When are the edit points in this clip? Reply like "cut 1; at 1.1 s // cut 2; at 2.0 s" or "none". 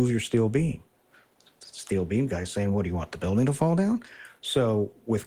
none